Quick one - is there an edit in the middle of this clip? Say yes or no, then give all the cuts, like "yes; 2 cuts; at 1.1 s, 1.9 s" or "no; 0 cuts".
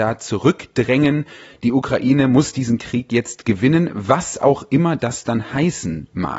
no; 0 cuts